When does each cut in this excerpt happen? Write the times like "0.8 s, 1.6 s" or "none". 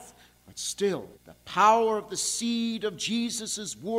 1.1 s